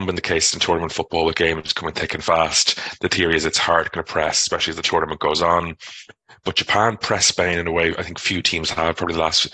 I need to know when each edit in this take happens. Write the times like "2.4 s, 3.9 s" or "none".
none